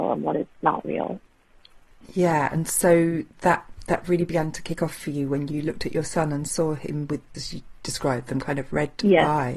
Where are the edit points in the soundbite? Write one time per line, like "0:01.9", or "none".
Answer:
0:07.3